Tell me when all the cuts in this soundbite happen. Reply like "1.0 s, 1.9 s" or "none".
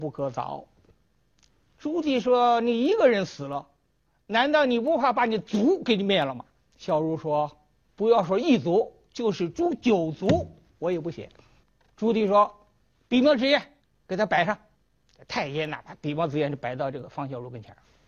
0.9 s